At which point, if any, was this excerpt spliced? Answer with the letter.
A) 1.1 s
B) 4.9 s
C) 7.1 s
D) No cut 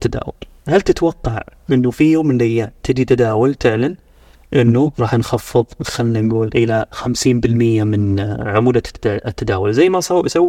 B